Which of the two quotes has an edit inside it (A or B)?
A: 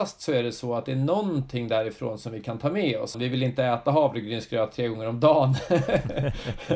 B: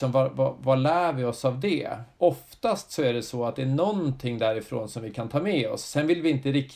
A